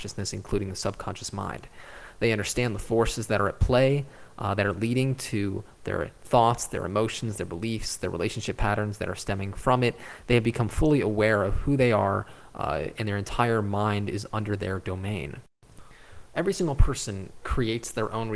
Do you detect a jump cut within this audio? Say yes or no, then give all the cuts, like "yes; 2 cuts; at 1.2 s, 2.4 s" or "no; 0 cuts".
no; 0 cuts